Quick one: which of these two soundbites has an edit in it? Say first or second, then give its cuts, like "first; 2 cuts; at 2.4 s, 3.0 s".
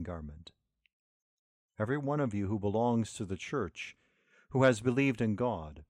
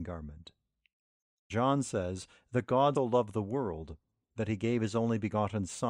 second; 2 cuts; at 1.5 s, 3.0 s